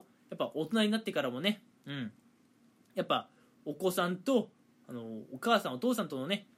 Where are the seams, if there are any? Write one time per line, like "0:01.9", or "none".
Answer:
none